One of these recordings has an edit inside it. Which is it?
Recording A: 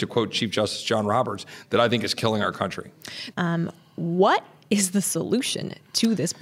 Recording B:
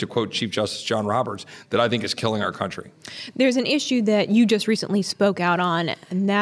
A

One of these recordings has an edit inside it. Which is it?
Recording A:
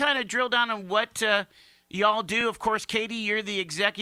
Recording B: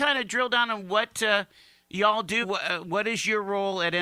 B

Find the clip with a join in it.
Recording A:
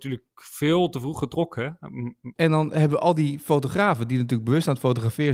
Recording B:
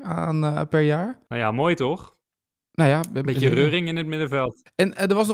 A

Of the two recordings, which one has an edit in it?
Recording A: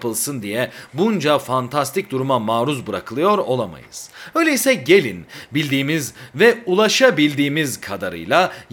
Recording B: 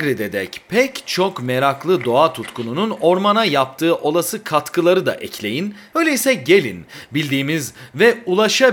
B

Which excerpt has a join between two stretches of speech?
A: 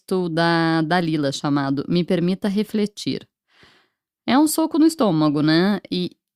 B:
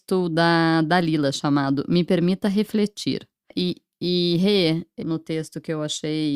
B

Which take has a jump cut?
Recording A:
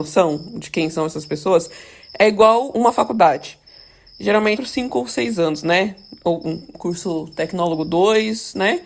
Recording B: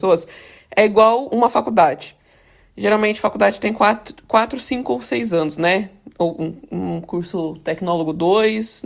A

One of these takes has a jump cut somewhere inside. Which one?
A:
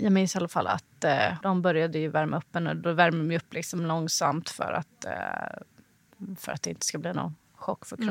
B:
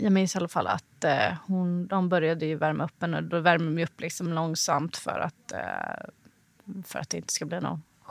A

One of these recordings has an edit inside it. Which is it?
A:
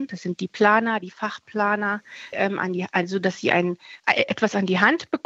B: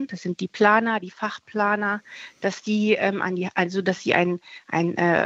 A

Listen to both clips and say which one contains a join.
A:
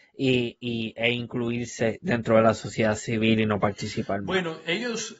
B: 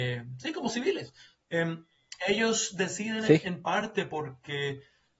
B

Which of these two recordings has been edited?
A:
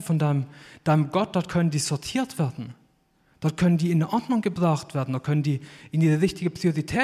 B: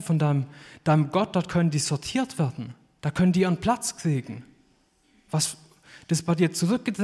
B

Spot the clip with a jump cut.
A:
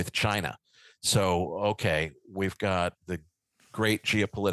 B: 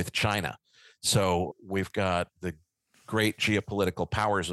B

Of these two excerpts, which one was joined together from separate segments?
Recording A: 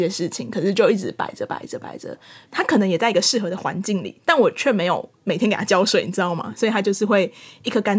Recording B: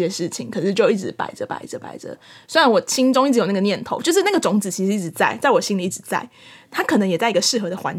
A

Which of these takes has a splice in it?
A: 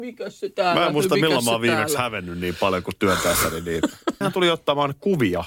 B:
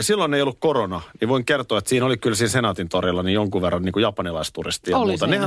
A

